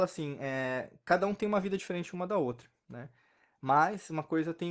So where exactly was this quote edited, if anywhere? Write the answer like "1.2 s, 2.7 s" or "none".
none